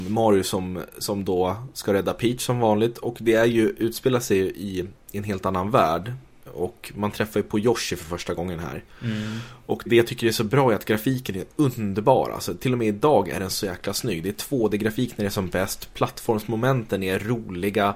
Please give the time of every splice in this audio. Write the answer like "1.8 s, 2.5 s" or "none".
9.9 s

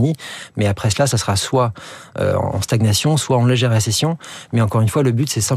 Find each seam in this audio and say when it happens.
none

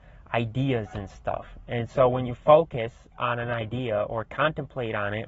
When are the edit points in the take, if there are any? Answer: none

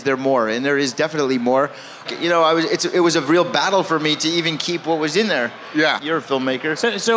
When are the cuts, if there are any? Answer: 2.1 s, 6.0 s

